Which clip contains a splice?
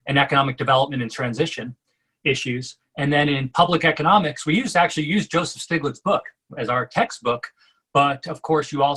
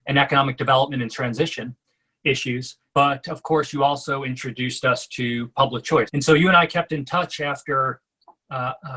second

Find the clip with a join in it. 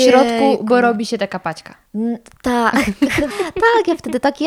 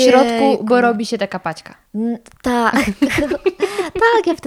first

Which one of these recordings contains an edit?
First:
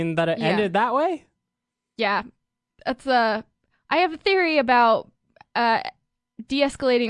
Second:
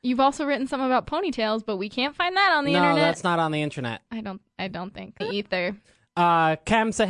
second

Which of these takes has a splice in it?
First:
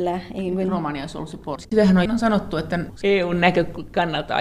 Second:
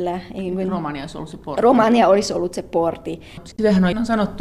first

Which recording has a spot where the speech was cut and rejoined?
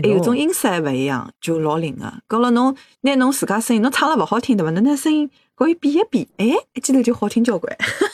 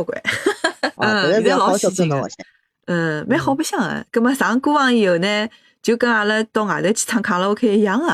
second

